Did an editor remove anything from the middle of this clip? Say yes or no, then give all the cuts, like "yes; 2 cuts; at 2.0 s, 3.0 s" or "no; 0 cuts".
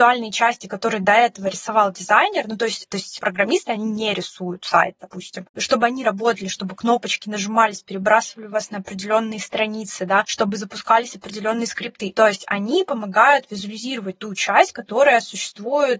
yes; 2 cuts; at 2.9 s, 12.1 s